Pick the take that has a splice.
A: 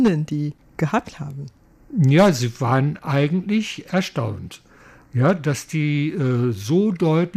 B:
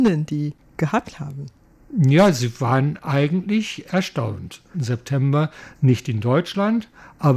B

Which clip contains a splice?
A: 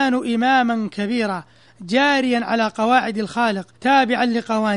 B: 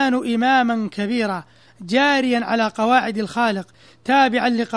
A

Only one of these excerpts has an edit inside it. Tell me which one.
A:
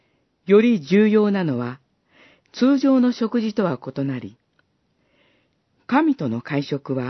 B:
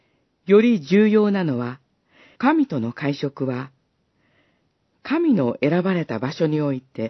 B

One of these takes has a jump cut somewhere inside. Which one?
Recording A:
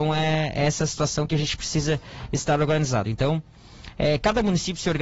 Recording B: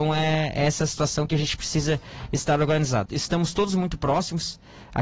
B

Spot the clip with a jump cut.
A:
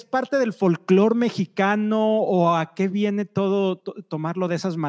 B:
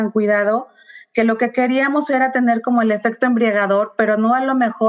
A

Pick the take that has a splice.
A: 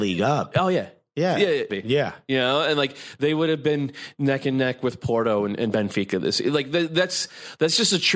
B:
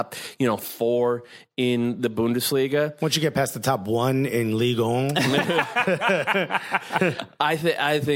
A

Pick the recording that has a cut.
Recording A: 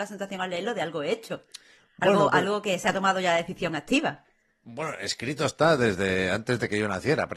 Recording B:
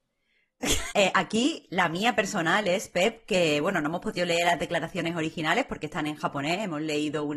B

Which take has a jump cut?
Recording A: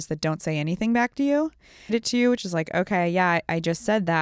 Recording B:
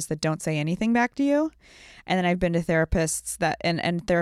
A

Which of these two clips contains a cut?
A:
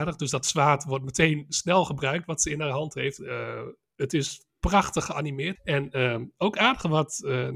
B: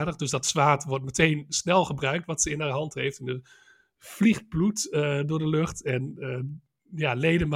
A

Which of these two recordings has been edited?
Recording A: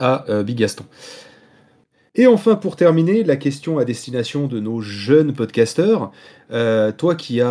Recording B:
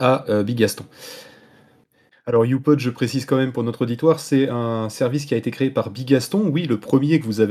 B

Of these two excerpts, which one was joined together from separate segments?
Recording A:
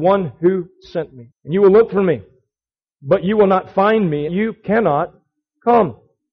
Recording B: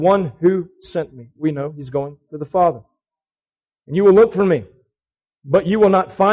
A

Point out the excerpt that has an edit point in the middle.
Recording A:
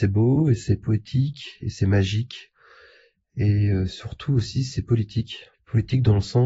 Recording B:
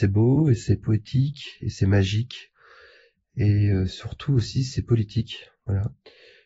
A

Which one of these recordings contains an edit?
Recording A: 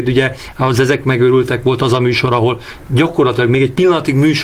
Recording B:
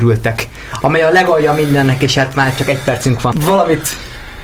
B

